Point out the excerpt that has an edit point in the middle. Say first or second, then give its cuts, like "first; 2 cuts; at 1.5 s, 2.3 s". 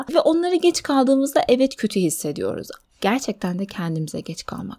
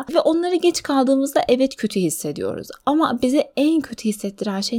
first; 1 cut; at 2.8 s